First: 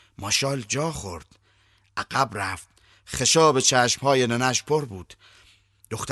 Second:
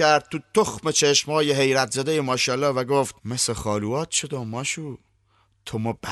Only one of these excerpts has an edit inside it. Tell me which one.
second; 1 cut; at 3.2 s

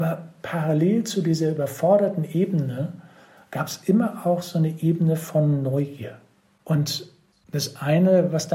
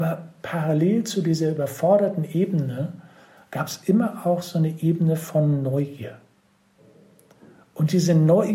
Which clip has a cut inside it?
first; 1 cut; at 6.5 s

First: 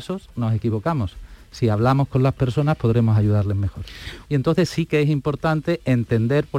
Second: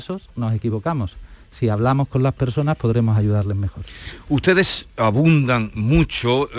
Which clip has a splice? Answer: first; 1 cut; at 4.2 s

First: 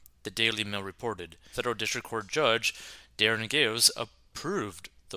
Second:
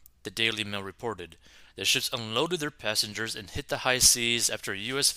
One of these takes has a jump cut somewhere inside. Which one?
first; 1 cut; at 1.5 s

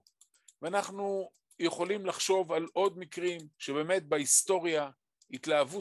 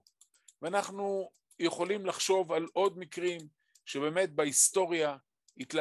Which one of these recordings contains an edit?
first; 1 cut; at 3.5 s

